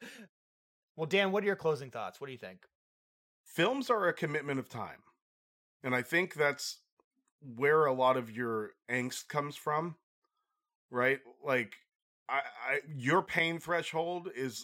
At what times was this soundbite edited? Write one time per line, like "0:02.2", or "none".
none